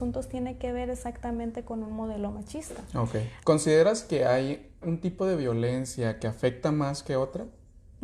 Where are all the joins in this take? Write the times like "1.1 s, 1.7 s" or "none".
3.4 s, 4.8 s

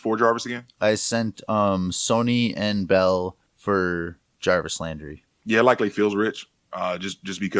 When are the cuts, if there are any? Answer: none

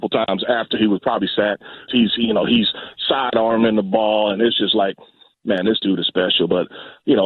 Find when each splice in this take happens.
1.9 s

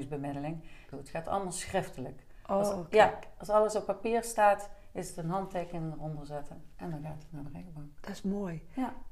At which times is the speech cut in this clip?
0.9 s

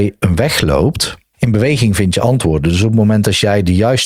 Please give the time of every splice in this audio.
1.3 s

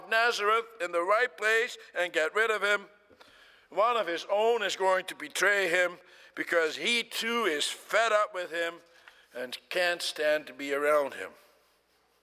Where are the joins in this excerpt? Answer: none

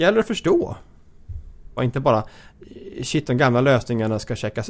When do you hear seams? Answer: 1.8 s

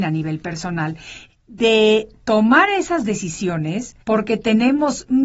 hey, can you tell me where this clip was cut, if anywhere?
1.3 s, 4.0 s

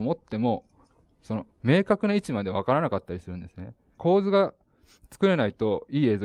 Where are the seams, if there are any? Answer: 4.0 s

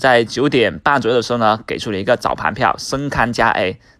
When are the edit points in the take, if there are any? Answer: none

